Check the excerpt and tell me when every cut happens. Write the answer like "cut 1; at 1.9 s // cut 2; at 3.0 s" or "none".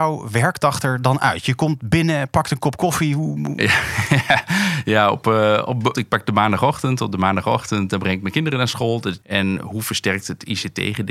cut 1; at 5.9 s // cut 2; at 9.2 s